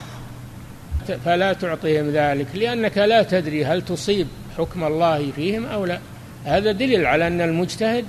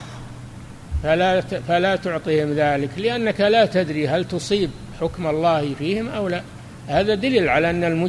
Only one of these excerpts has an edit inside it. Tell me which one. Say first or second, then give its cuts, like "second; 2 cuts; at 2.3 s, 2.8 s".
first; 1 cut; at 1.0 s